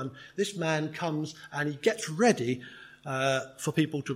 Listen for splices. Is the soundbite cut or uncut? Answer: uncut